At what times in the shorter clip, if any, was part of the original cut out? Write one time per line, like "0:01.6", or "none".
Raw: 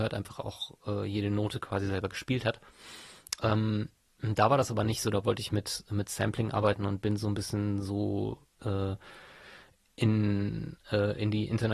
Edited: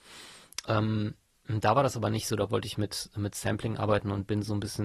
none